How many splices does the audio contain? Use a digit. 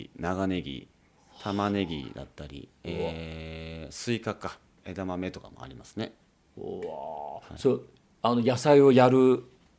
1